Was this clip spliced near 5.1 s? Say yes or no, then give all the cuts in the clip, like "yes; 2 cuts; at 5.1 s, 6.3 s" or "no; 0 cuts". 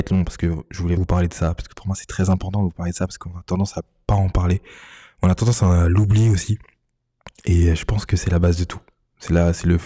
no; 1 cut; at 1.0 s